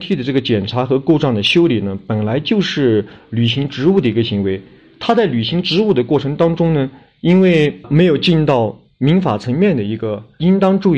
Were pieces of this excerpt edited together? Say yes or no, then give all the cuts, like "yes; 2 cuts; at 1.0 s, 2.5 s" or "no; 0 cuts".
no; 0 cuts